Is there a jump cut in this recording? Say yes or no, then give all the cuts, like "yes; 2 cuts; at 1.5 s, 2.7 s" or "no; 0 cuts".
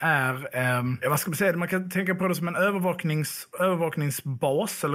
no; 0 cuts